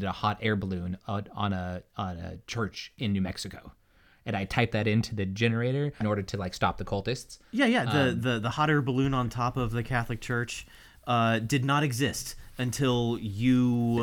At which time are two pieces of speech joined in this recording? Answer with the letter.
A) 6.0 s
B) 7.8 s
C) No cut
A